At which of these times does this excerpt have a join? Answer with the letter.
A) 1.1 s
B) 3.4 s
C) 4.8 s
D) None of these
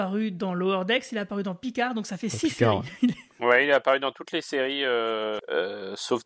B